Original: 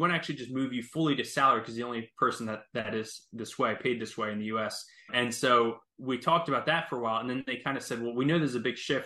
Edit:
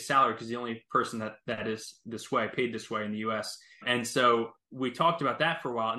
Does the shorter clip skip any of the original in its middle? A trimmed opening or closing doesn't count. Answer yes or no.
no